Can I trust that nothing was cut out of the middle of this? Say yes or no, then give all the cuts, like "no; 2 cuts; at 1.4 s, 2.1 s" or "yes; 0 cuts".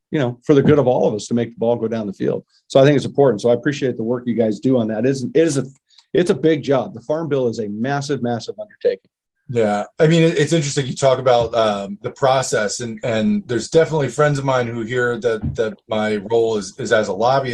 yes; 0 cuts